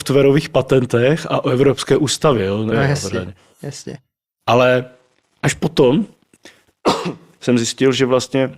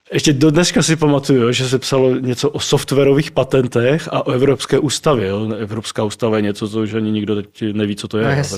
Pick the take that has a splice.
first; 1 cut; at 2.7 s

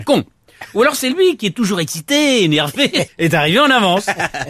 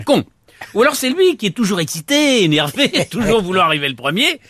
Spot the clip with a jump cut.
first; 1 cut; at 3.1 s

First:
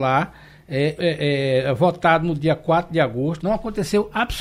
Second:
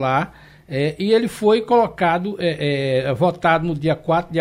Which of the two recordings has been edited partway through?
first; 2 cuts; at 1.0 s, 3.4 s

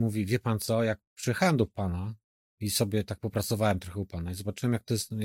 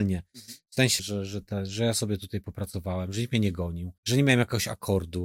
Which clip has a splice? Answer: second; 2 cuts; at 1.0 s, 4.0 s

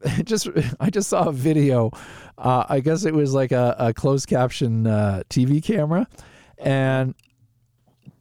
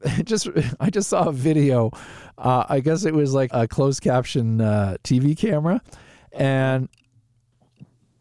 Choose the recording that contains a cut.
second; 1 cut; at 3.5 s

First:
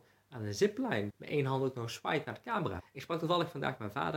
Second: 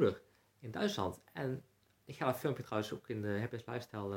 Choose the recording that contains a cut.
first; 2 cuts; at 1.1 s, 2.8 s

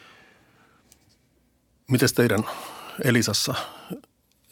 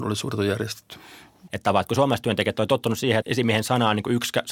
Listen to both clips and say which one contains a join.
second; 2 cuts; at 1.5 s, 3.2 s

